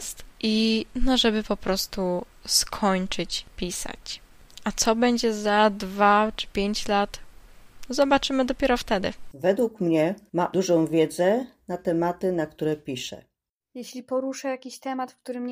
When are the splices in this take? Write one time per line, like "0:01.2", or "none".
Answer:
none